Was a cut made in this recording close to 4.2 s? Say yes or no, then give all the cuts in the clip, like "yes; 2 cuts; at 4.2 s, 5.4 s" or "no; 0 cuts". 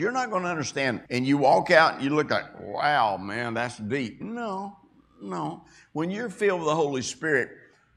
no; 1 cut; at 1.1 s